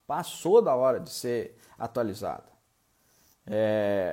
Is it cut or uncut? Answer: uncut